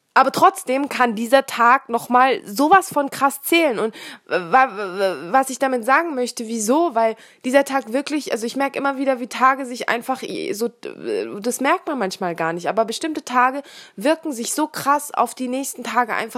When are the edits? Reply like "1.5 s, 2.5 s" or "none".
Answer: none